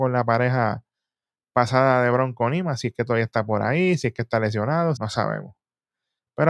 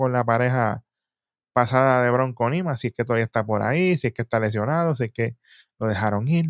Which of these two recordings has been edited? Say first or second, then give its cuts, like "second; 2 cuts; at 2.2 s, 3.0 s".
first; 1 cut; at 5.0 s